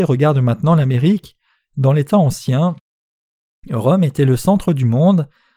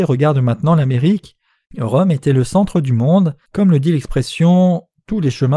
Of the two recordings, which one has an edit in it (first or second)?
second